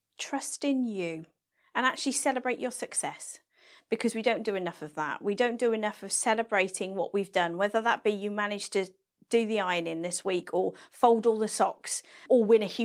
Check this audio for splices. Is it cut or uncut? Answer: uncut